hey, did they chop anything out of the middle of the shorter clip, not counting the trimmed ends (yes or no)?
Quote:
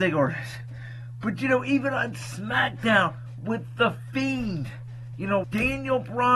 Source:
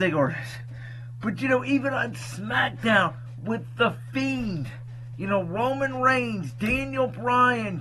yes